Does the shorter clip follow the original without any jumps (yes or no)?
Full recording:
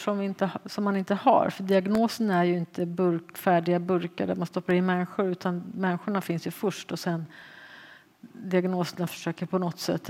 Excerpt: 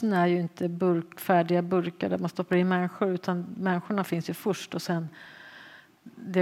yes